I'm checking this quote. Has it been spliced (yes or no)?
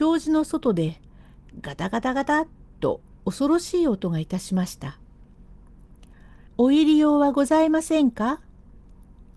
yes